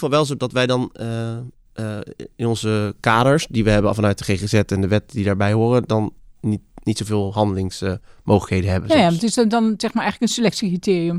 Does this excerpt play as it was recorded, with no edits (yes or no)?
yes